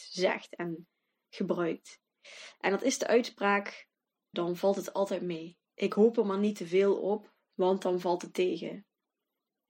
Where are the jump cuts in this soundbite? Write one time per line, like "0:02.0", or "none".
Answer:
0:04.3
0:05.7